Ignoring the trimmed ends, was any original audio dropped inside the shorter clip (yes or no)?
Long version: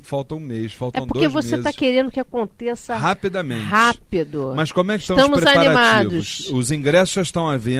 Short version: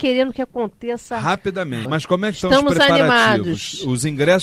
yes